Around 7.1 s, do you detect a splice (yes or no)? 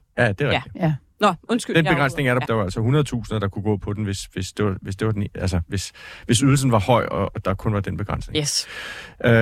no